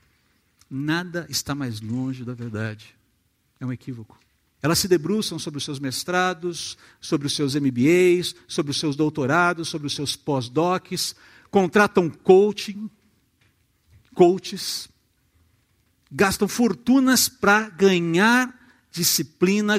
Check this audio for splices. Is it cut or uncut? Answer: cut